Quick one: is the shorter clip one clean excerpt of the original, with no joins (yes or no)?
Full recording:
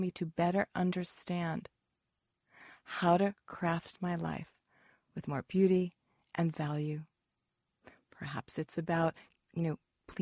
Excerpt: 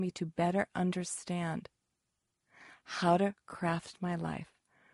yes